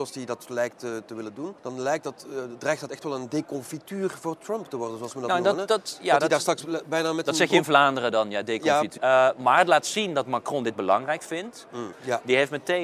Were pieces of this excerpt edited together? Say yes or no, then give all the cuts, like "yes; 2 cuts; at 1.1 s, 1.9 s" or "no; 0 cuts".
yes; 3 cuts; at 1.6 s, 9.0 s, 11.9 s